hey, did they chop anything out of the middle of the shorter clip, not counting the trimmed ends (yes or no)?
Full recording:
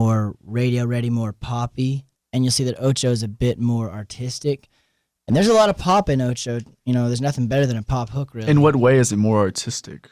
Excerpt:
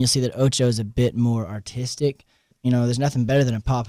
yes